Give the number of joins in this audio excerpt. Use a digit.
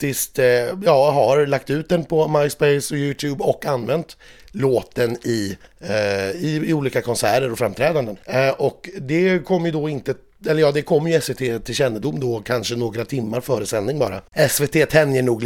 0